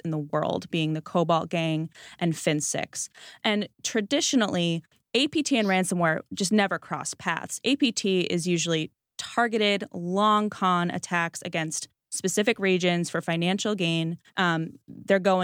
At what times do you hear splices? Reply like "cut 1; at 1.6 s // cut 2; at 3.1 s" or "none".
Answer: cut 1; at 14.3 s